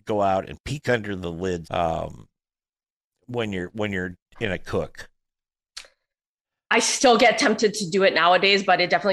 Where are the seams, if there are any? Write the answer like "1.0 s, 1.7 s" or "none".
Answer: 1.6 s